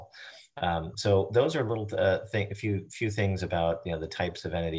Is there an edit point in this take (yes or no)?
no